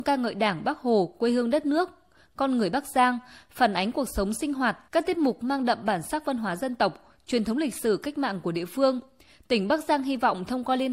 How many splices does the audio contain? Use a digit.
1